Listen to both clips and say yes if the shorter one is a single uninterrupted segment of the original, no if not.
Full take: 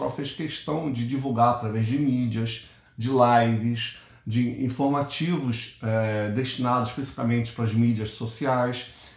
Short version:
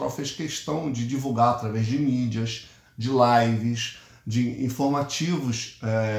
yes